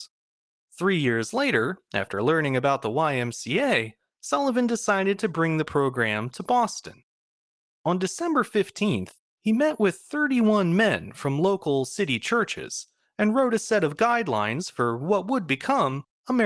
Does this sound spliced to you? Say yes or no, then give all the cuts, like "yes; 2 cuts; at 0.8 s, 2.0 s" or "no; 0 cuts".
no; 0 cuts